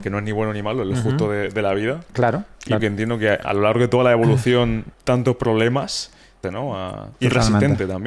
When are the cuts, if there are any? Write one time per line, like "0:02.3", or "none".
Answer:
0:02.8
0:04.9
0:06.4